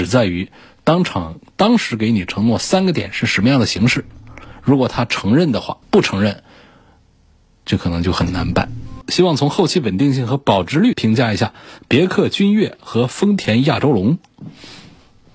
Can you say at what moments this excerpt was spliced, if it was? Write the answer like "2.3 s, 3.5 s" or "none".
5.8 s